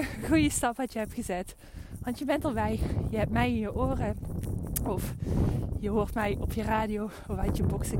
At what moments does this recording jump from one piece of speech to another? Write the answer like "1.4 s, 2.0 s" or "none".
none